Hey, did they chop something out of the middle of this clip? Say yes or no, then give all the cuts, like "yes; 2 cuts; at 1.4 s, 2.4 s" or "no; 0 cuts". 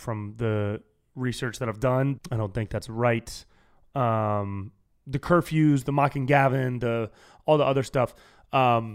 yes; 1 cut; at 2.2 s